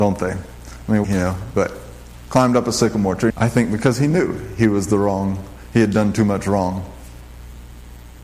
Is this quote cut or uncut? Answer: cut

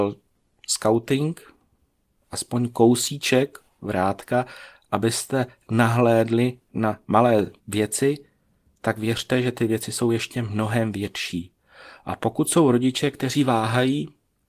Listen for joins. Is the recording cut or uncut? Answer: cut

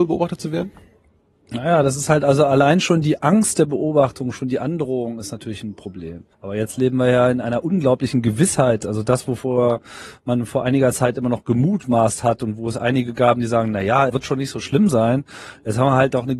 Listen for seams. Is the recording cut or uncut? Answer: cut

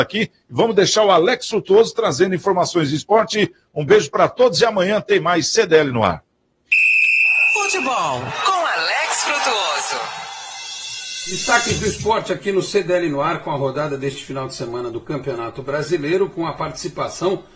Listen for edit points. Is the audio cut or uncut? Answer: uncut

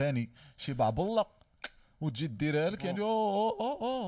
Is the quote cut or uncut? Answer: cut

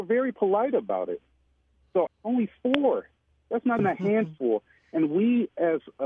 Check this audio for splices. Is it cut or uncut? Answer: cut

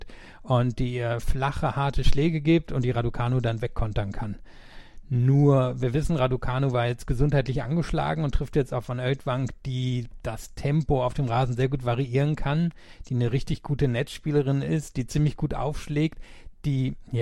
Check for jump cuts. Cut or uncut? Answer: uncut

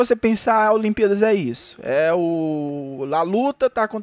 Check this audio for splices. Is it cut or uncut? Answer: uncut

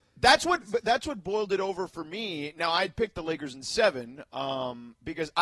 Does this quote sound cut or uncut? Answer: uncut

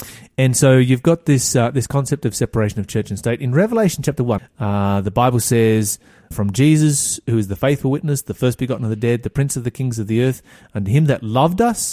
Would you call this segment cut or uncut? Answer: cut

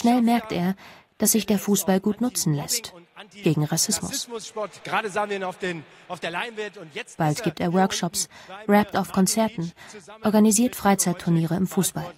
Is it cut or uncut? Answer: uncut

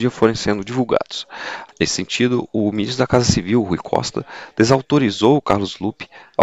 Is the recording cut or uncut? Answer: cut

